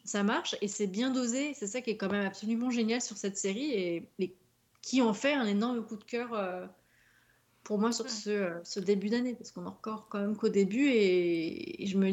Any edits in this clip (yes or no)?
no